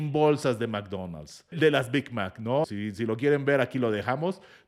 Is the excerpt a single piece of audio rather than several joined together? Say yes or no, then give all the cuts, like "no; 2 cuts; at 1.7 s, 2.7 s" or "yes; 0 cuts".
no; 2 cuts; at 1.5 s, 2.6 s